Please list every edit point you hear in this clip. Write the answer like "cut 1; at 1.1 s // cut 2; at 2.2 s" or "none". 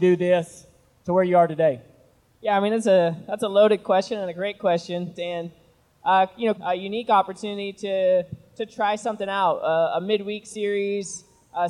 cut 1; at 5.2 s // cut 2; at 6.5 s